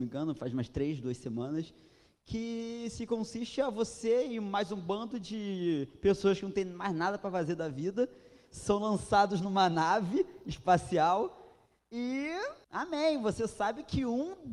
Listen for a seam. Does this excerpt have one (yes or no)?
yes